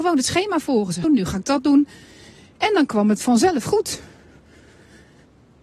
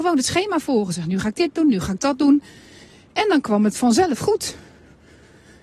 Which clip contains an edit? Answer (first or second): first